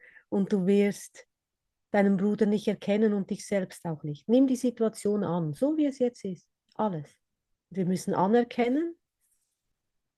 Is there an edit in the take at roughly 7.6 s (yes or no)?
yes